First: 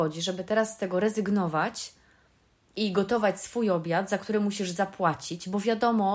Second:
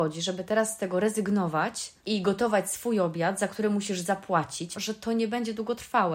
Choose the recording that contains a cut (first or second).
second